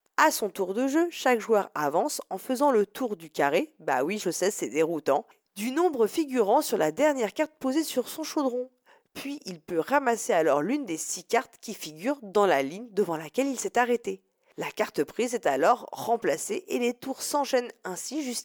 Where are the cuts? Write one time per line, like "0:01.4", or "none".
0:04.2